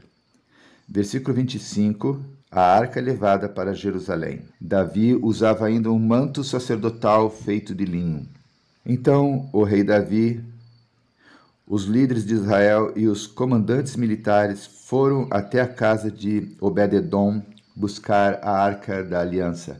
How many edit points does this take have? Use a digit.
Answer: 3